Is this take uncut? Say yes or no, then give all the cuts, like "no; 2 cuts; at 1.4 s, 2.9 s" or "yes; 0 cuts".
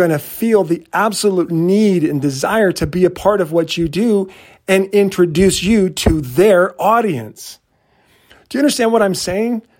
yes; 0 cuts